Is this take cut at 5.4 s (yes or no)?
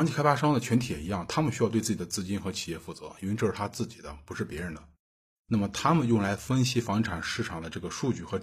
yes